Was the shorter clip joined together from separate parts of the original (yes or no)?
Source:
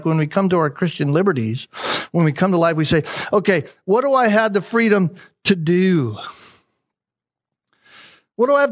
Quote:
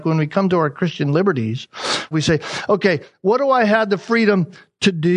yes